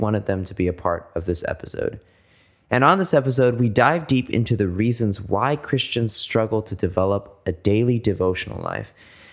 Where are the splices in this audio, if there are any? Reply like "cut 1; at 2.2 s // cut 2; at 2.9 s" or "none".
none